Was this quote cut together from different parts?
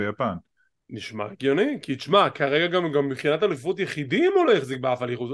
no; 0 cuts

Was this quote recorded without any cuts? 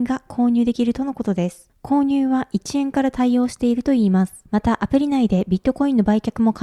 yes; 0 cuts

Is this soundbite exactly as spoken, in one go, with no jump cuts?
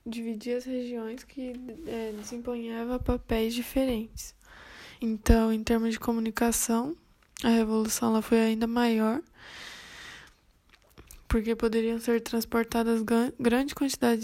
no; 1 cut; at 5.0 s

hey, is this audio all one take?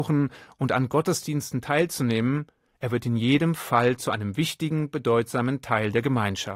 yes; 0 cuts

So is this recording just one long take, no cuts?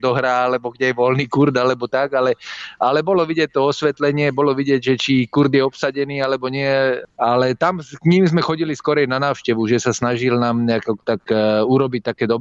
yes; 0 cuts

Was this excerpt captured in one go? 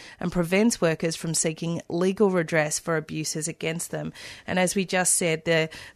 yes; 0 cuts

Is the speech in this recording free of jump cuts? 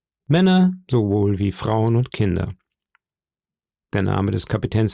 yes; 0 cuts

